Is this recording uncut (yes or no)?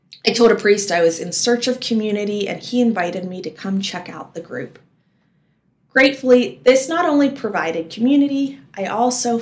yes